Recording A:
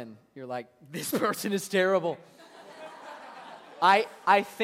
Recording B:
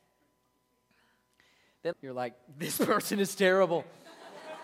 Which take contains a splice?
B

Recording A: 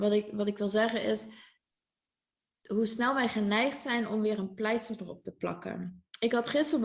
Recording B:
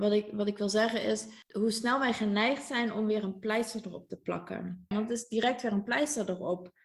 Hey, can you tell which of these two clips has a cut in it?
B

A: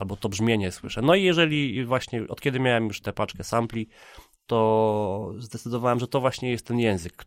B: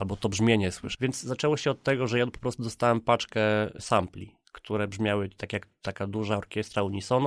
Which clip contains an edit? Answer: B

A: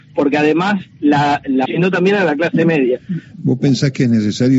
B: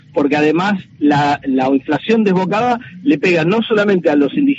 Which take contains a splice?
A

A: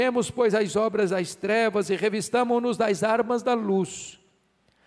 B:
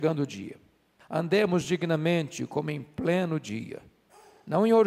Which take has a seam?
B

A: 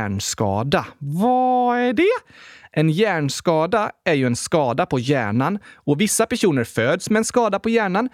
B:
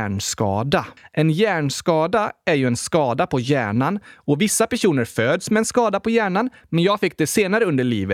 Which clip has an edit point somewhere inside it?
B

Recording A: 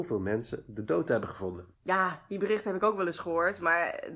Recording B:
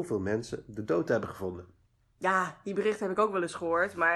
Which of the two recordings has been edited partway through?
A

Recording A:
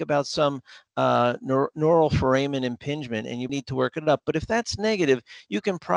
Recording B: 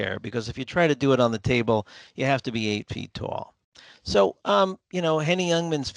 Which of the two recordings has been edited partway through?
A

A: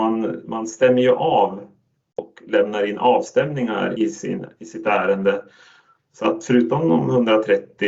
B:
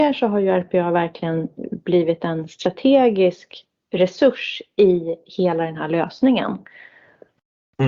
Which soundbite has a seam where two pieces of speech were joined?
A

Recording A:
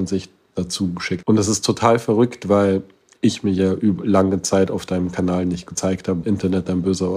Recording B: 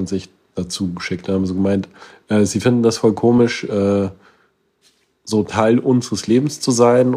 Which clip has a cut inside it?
A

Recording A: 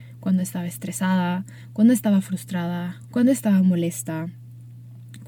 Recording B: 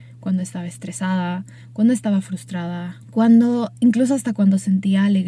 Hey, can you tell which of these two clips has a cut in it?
B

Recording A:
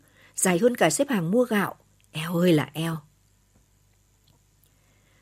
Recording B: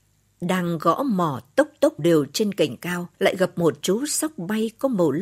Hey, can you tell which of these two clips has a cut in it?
B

